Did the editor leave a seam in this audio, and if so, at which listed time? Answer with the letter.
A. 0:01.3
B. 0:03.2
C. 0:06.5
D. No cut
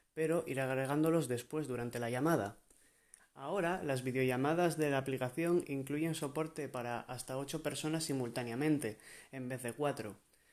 B